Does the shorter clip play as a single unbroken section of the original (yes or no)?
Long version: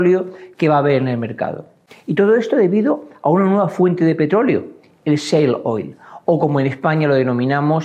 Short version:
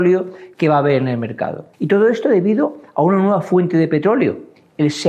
no